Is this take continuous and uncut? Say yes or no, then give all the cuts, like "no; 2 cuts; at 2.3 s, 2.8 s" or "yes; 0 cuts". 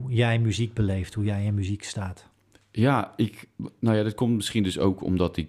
yes; 0 cuts